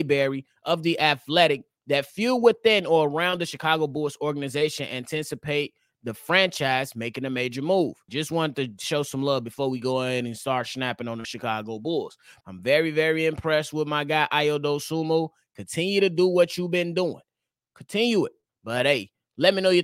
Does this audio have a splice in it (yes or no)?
yes